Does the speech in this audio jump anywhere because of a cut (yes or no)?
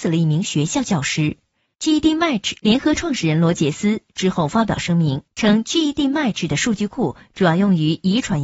yes